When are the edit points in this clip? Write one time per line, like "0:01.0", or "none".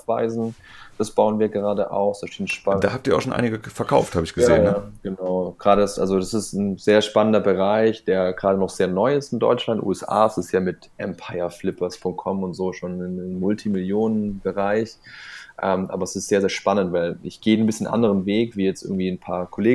none